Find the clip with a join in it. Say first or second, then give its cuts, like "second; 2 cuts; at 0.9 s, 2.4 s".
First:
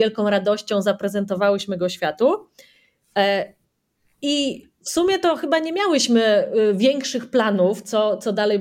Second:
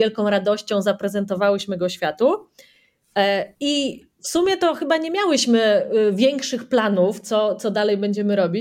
second; 1 cut; at 3.5 s